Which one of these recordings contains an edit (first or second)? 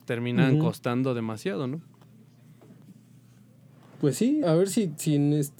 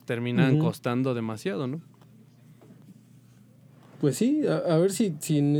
first